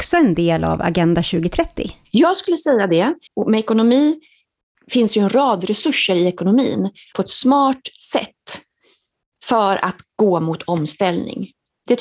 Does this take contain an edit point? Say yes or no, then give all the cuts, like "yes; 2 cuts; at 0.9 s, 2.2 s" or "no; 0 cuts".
yes; 2 cuts; at 3.3 s, 7.1 s